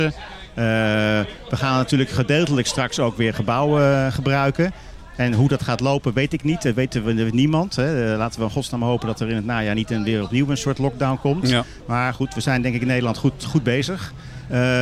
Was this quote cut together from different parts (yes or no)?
no